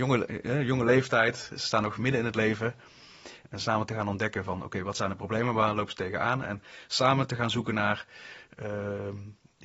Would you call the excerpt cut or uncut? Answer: cut